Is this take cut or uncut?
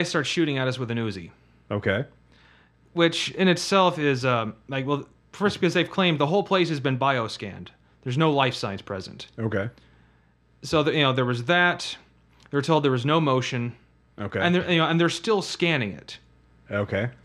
uncut